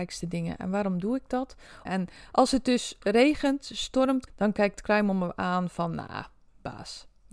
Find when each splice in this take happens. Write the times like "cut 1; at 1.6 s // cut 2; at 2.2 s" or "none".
cut 1; at 1.9 s // cut 2; at 4.3 s